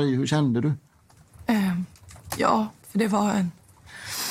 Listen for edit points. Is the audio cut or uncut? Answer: uncut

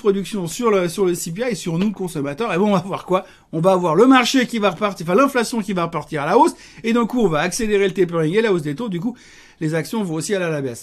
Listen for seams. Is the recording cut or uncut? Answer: uncut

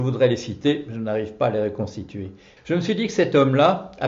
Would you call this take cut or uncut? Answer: cut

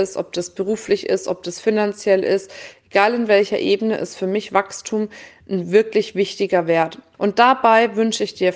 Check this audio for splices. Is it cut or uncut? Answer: cut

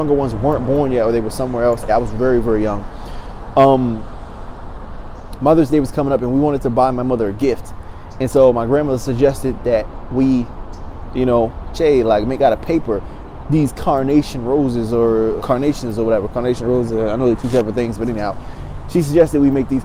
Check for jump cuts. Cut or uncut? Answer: cut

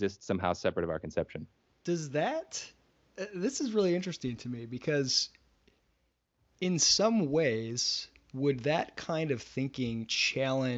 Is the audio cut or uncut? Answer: uncut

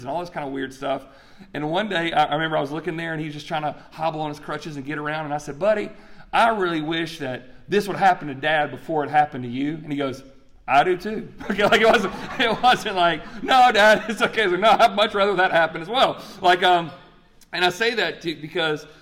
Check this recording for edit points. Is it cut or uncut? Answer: uncut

